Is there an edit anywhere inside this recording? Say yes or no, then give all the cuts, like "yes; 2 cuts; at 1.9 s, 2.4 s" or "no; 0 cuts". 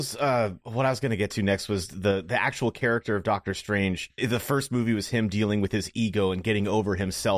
yes; 1 cut; at 4.2 s